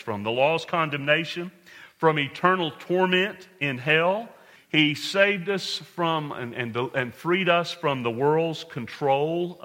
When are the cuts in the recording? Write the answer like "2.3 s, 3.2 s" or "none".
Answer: 4.6 s